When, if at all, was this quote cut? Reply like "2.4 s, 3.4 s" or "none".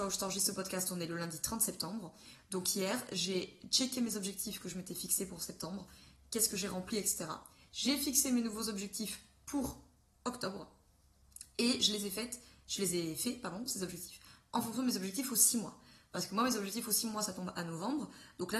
none